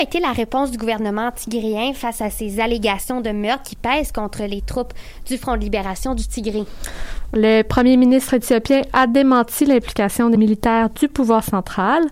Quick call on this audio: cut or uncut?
cut